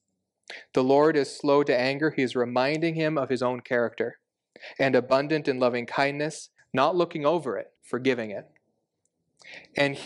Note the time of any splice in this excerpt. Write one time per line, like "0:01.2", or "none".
0:06.6
0:07.8